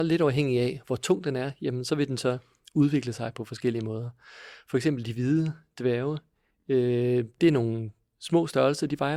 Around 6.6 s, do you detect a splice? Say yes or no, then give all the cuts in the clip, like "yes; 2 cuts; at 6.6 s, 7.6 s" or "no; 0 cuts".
no; 0 cuts